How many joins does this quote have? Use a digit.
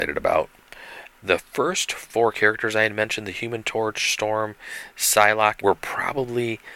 2